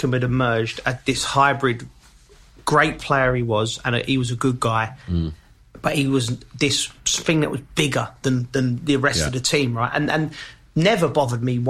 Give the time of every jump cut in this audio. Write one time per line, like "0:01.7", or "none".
none

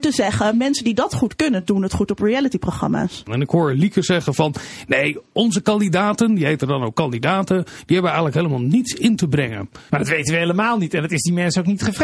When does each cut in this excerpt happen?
0:03.3
0:09.9

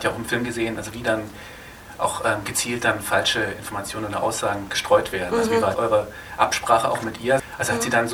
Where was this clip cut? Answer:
none

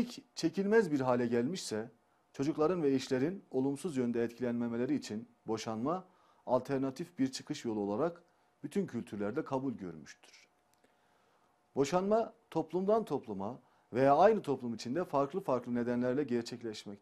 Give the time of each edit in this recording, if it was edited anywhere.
none

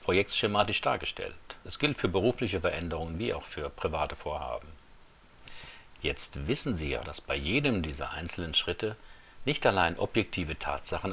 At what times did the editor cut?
0:07.0

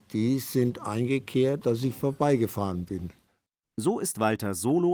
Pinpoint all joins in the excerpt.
0:01.6

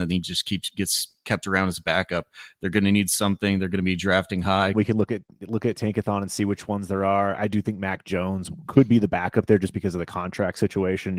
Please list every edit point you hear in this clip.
0:04.7
0:07.4

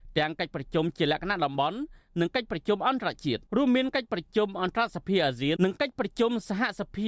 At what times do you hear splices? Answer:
0:03.5
0:05.6

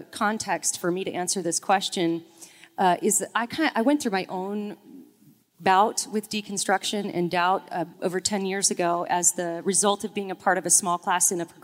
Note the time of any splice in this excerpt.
0:07.9

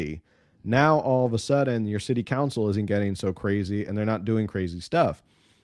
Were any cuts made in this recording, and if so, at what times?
none

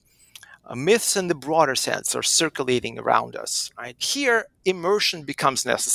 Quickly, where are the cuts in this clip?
0:04.0

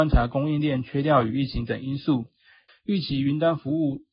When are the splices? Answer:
0:02.7

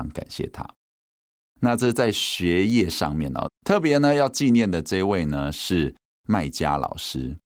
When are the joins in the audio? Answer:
0:03.4

